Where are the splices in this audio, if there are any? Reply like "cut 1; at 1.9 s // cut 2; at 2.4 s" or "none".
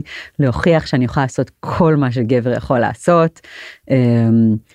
none